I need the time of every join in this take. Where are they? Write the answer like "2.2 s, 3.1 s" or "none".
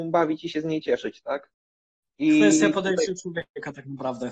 none